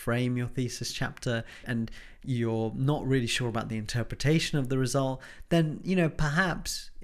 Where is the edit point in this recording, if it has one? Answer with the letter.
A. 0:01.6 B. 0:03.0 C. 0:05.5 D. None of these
A